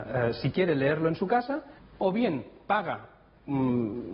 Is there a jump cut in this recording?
yes; 1 cut; at 1.8 s

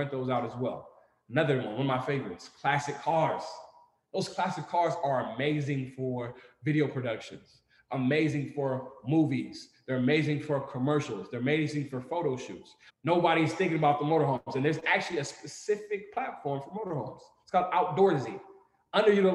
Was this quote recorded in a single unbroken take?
no; 1 cut; at 12.9 s

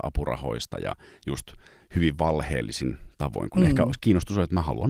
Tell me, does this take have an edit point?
no; 0 cuts

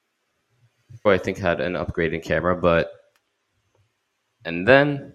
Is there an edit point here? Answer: yes; 1 cut; at 1.1 s

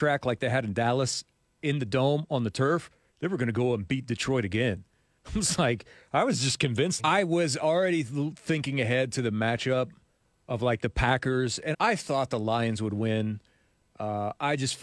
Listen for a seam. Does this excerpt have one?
yes; 2 cuts; at 7.0 s, 11.7 s

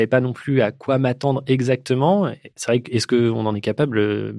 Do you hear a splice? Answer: no; 0 cuts

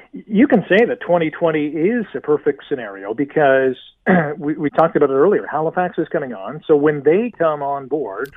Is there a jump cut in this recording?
yes; 1 cut; at 4.7 s

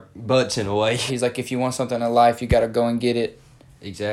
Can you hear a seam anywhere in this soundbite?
yes; 1 cut; at 1.1 s

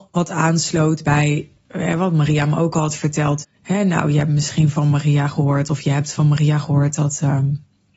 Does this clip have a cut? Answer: yes; 1 cut; at 3.4 s

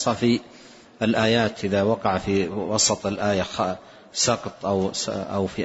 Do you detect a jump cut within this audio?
no; 0 cuts

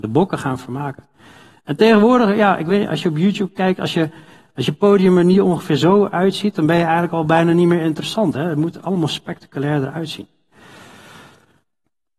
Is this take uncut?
yes; 0 cuts

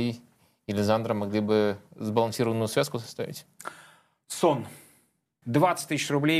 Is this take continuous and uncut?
no; 1 cut; at 5.4 s

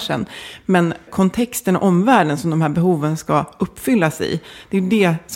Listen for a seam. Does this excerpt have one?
yes; 1 cut; at 1.1 s

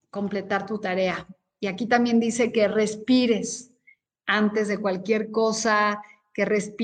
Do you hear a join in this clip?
no; 0 cuts

